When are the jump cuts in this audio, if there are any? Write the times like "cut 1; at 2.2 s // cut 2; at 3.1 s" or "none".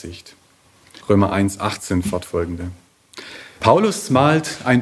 cut 1; at 1.0 s // cut 2; at 3.6 s

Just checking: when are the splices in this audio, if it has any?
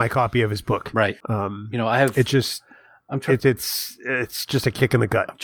cut 1; at 1.2 s // cut 2; at 3.4 s

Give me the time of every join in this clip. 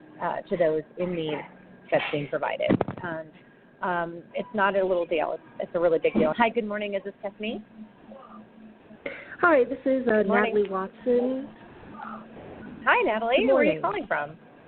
cut 1; at 4.3 s // cut 2; at 6.3 s

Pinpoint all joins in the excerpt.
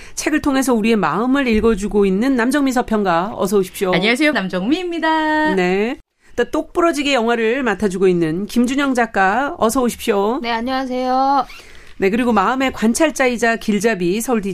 cut 1; at 4.3 s

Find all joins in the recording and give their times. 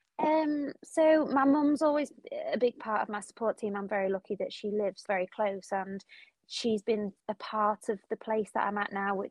cut 1; at 5.1 s // cut 2; at 7.2 s

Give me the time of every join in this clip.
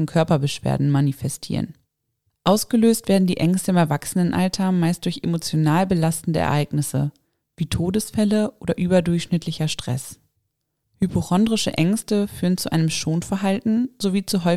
none

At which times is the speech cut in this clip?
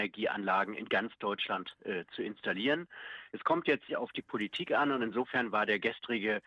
cut 1; at 3.9 s

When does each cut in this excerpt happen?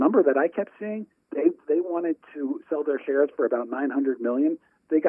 none

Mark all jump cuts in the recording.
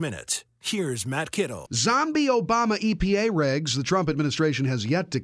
cut 1; at 1.7 s

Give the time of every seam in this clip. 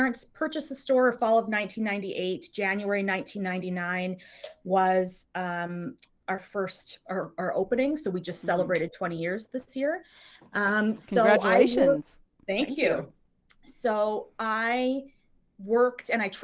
none

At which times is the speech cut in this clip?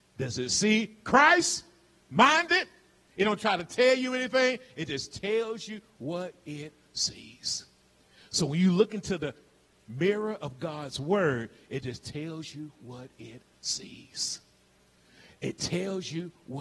cut 1; at 3.1 s

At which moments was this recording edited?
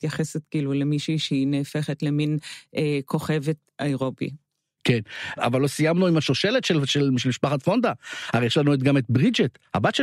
cut 1; at 3.6 s

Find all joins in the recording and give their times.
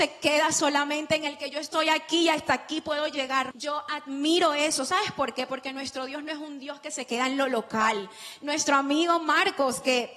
cut 1; at 3.5 s

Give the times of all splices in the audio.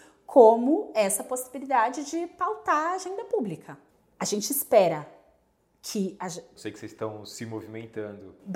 cut 1; at 6.6 s

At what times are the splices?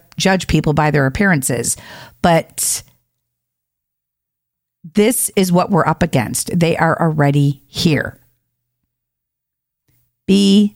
none

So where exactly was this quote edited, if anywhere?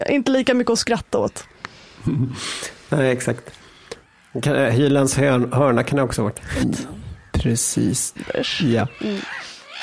cut 1; at 6.6 s // cut 2; at 8.2 s

